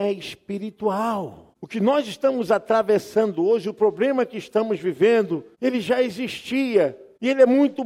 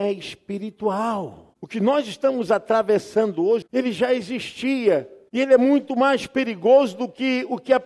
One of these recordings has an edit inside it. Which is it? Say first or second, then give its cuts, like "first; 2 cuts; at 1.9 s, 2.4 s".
second; 1 cut; at 3.6 s